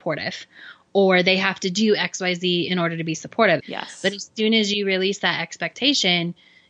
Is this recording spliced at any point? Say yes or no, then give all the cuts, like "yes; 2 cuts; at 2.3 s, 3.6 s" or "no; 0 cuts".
yes; 1 cut; at 3.6 s